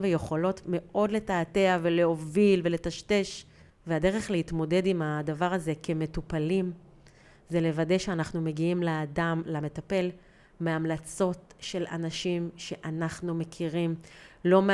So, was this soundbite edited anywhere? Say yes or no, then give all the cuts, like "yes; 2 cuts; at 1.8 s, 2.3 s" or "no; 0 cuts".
yes; 1 cut; at 3.7 s